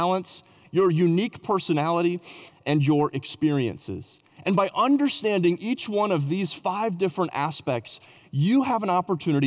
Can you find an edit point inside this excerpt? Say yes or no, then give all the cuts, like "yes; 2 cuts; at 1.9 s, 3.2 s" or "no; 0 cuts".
no; 0 cuts